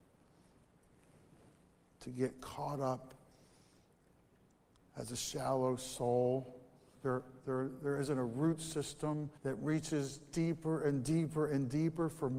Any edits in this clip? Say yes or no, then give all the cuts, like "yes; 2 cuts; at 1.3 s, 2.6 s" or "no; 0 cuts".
yes; 2 cuts; at 6.9 s, 9.4 s